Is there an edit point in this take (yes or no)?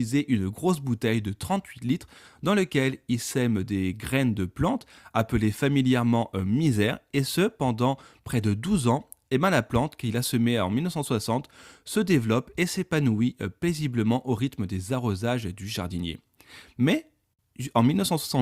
no